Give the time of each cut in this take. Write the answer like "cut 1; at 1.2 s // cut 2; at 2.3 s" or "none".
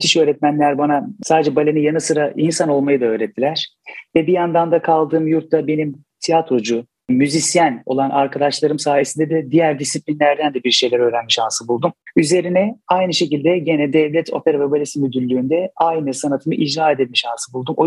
cut 1; at 7.0 s